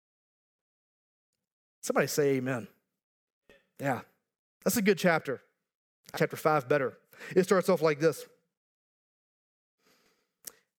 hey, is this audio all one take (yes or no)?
no